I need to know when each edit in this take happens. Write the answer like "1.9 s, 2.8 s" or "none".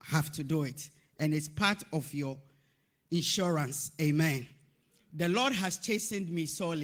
none